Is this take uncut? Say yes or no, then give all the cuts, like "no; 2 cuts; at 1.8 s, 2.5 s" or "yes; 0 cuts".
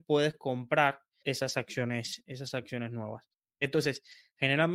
no; 1 cut; at 1.2 s